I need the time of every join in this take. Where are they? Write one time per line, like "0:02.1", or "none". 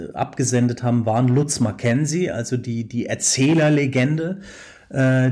none